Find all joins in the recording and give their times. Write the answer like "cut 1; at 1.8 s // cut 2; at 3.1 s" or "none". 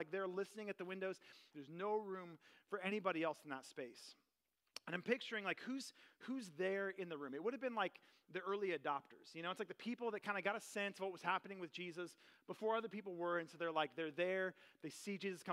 cut 1; at 1.5 s